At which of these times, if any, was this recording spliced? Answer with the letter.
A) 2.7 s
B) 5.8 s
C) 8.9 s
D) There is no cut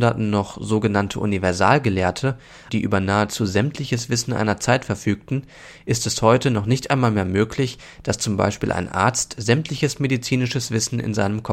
A